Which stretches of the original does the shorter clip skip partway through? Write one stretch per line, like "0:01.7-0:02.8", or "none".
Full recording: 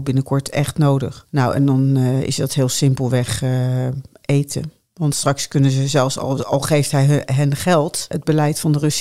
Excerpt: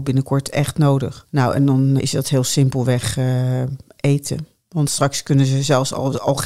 0:02.0-0:02.2